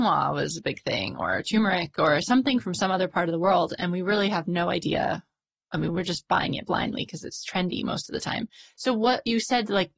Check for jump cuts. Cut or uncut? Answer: uncut